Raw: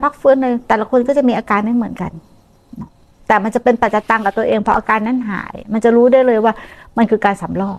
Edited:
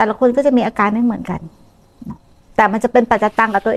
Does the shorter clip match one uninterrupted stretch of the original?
yes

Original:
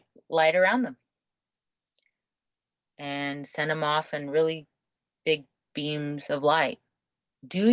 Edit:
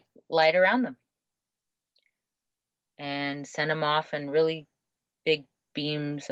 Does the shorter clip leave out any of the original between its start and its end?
no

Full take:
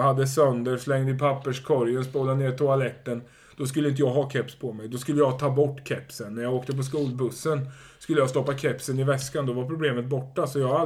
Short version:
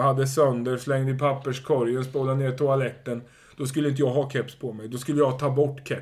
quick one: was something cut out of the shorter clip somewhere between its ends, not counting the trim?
no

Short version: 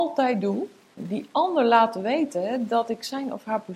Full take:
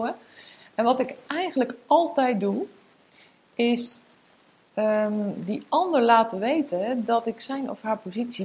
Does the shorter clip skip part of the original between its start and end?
yes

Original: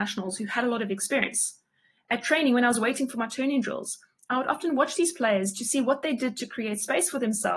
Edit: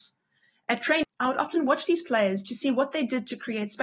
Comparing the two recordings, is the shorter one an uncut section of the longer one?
no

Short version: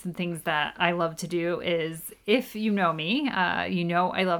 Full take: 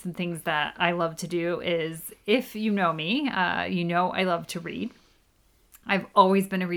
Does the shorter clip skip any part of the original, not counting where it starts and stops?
no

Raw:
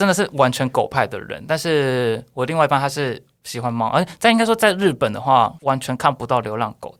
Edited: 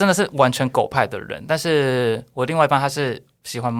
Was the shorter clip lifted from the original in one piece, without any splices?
yes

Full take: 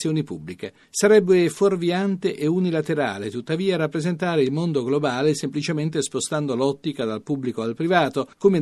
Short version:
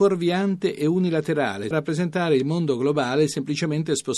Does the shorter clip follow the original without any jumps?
no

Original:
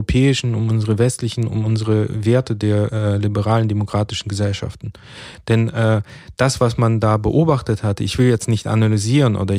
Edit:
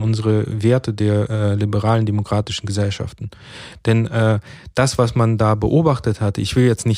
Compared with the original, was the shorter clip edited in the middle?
no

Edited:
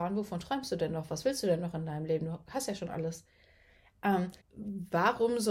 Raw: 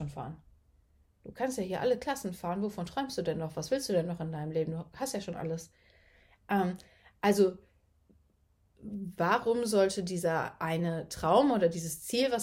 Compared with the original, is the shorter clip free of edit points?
no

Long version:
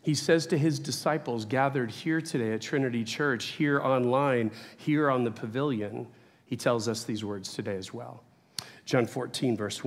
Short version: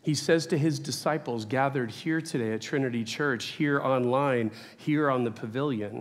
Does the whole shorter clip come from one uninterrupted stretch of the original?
yes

